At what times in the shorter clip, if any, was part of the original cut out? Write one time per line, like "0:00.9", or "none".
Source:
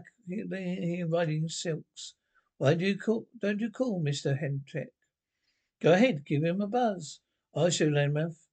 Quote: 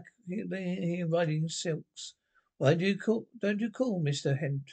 none